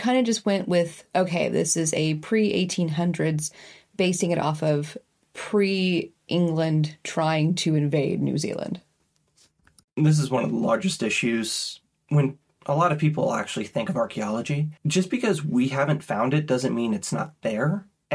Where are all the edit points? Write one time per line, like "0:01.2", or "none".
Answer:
0:14.8